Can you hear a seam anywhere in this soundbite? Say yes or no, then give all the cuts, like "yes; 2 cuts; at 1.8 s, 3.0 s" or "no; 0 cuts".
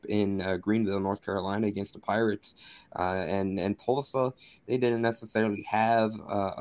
no; 0 cuts